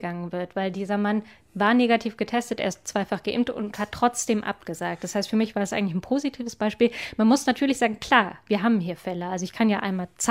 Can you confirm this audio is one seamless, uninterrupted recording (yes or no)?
yes